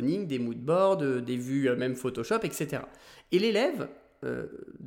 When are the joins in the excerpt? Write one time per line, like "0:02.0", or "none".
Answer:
none